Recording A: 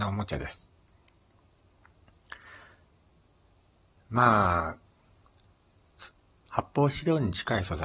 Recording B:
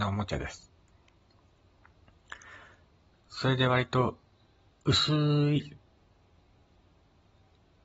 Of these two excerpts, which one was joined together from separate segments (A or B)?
B